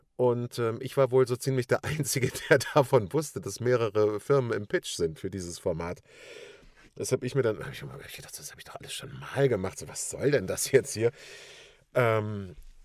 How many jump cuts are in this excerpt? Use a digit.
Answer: 0